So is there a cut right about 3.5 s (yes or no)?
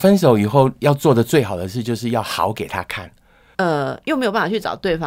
yes